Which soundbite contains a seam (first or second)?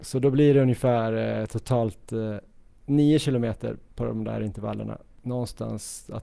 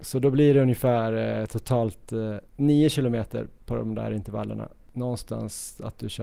second